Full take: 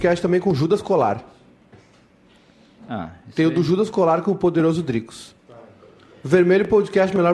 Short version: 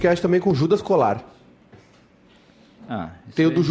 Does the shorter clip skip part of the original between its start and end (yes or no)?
no